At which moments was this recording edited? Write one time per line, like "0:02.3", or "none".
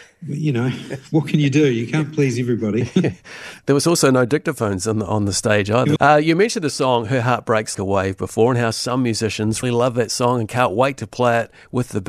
0:06.0
0:07.7
0:09.6